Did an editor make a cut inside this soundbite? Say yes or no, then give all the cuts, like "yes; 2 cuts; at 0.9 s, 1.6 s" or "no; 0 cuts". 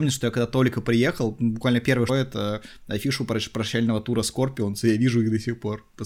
yes; 1 cut; at 2.1 s